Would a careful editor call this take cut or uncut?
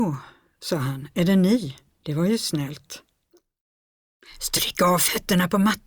uncut